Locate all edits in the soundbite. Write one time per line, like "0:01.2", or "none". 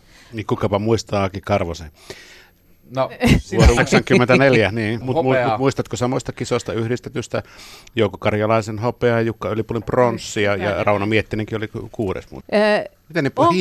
0:03.8
0:05.0
0:12.4